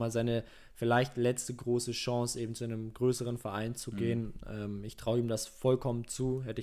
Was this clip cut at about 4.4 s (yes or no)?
no